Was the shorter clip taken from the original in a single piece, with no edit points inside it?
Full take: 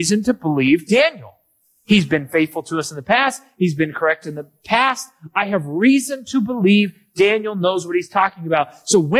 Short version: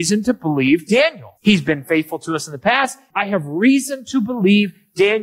no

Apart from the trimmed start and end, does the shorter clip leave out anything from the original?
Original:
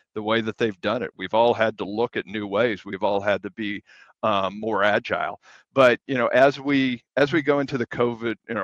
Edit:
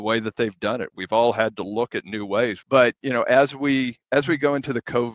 yes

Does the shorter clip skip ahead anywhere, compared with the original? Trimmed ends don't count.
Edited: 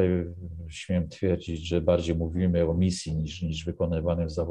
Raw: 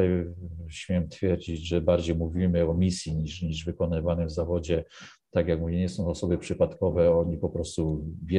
no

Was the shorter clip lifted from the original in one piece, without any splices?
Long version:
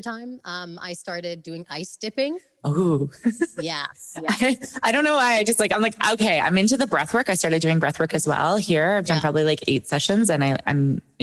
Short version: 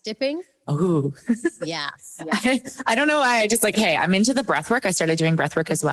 no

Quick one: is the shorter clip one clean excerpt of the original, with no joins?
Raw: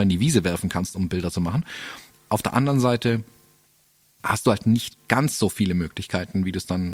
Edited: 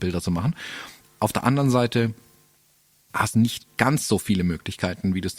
no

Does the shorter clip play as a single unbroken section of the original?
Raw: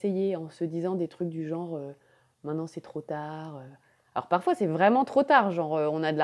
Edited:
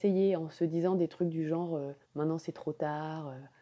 no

